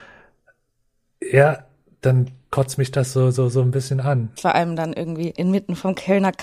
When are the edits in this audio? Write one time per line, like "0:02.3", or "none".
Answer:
0:04.4

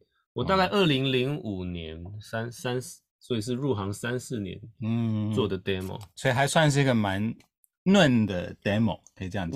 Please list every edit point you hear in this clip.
none

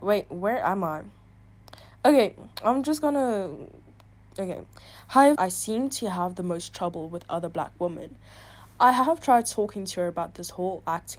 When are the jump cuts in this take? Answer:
0:05.3

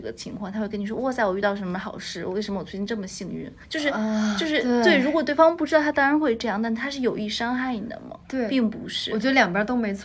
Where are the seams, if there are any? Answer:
none

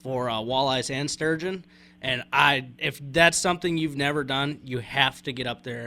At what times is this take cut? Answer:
0:02.7

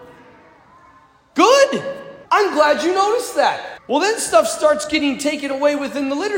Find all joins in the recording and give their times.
0:02.2
0:03.8

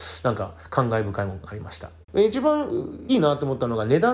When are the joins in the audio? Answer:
0:02.0
0:03.1

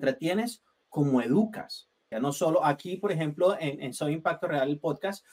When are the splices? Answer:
0:02.1

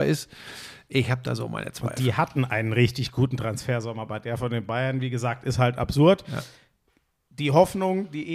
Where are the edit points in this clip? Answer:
none

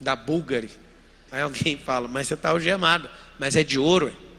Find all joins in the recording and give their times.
0:01.3

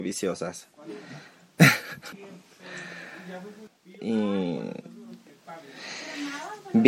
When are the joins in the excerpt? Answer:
0:02.1
0:03.7

